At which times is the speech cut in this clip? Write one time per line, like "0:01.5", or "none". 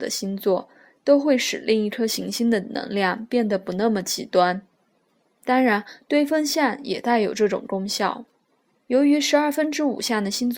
0:08.8